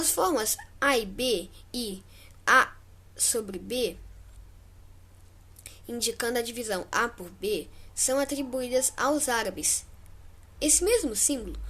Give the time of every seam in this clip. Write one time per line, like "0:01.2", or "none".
0:10.6